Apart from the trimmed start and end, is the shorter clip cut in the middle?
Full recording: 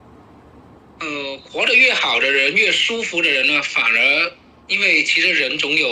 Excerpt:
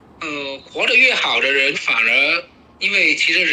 yes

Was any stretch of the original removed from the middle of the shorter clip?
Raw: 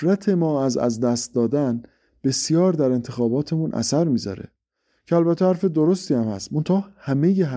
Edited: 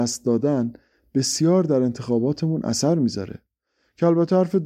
no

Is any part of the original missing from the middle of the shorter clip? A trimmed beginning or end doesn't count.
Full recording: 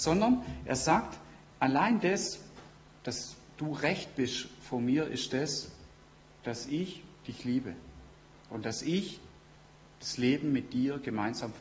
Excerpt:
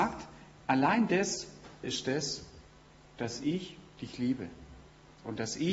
yes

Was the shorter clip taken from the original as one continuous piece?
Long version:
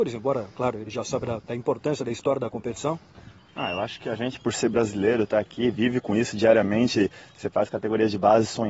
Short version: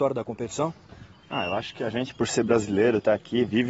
yes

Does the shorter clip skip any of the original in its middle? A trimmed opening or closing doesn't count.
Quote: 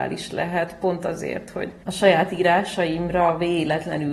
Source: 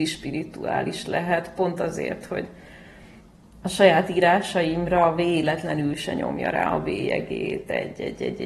yes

